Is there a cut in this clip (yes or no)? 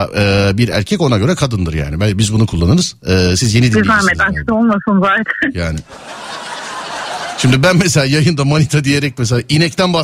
no